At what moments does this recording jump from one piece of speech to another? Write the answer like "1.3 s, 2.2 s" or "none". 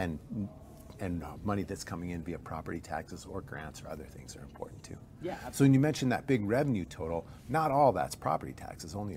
none